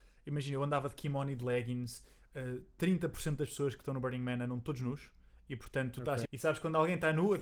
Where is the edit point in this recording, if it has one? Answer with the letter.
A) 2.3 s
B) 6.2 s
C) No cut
B